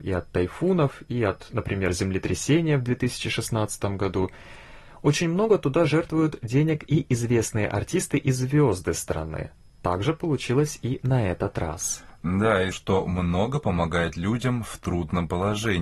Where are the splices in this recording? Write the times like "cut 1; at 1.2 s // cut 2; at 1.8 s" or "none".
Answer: cut 1; at 12.7 s